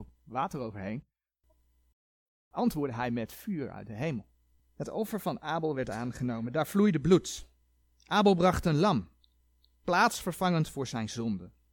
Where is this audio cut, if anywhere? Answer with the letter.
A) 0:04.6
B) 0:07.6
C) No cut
A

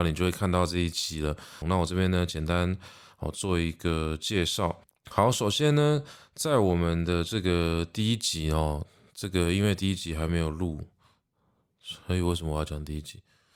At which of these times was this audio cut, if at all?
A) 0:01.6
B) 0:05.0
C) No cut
A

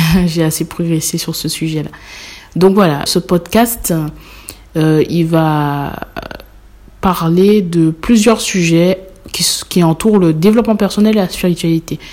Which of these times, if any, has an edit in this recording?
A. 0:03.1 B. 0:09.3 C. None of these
A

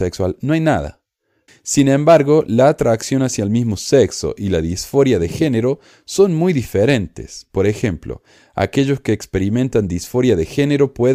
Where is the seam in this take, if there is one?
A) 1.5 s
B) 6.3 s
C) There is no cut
A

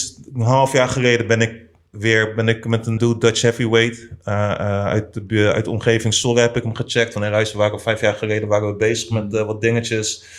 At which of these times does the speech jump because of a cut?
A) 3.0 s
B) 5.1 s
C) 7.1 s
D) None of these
A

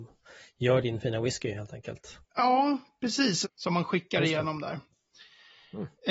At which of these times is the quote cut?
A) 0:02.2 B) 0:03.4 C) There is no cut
B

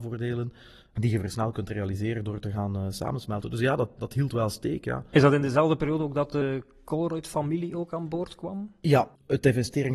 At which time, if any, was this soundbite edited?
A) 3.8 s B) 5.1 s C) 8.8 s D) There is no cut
D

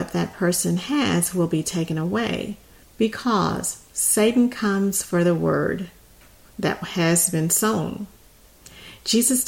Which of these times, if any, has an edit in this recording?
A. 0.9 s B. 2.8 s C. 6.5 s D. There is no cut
B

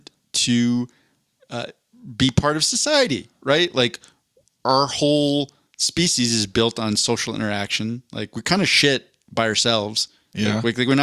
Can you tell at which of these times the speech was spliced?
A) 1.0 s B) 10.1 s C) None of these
C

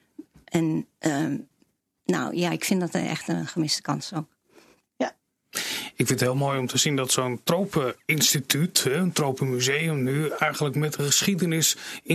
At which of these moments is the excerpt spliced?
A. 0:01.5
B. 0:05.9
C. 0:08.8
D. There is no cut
D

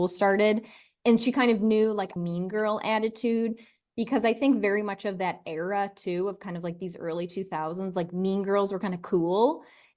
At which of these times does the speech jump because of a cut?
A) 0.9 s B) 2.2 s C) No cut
B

